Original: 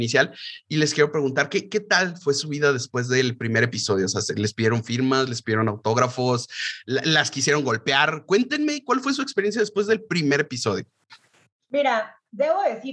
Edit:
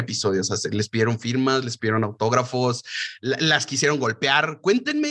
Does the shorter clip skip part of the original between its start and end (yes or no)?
no